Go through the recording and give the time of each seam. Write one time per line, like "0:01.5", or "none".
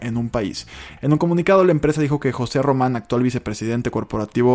0:01.0